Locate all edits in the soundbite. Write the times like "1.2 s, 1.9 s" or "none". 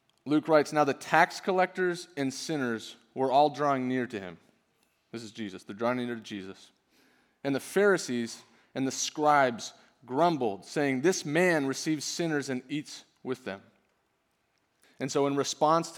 14.8 s